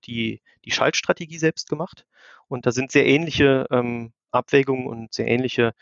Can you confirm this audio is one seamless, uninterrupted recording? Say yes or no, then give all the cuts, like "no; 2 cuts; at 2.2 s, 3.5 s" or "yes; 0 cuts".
yes; 0 cuts